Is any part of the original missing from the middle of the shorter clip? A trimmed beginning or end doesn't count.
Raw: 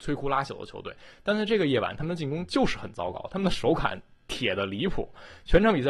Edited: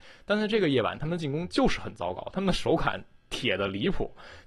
no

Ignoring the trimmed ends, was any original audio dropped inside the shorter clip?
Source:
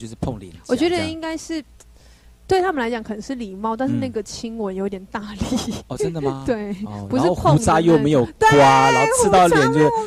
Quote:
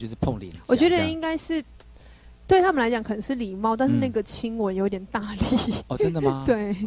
no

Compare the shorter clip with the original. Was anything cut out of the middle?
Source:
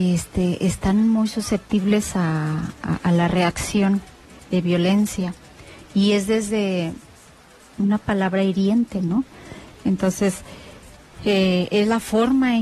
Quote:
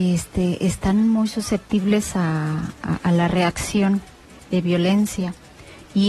no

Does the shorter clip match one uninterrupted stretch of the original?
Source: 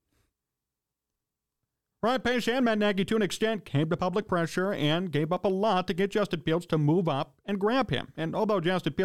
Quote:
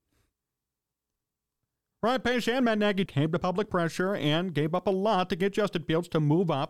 no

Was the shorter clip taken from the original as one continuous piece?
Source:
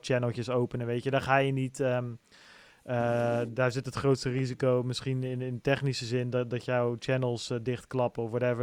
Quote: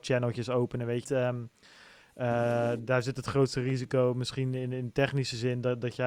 no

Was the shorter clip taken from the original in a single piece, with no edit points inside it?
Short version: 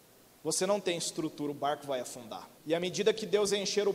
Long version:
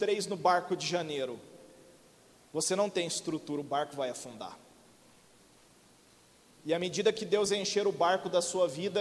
no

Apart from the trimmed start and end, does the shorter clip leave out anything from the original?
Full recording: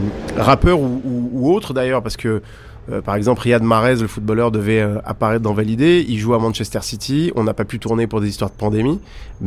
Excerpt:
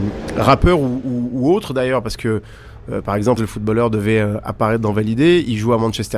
yes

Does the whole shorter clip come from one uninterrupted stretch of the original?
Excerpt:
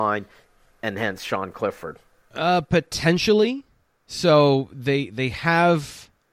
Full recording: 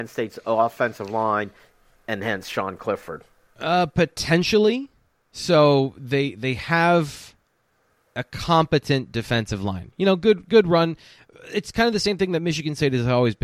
yes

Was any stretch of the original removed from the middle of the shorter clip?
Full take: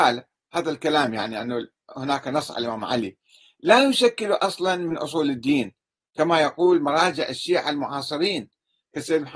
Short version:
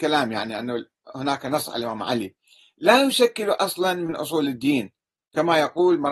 no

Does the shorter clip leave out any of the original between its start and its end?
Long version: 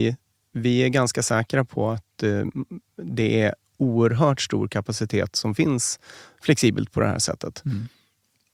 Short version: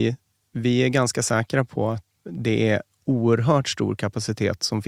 yes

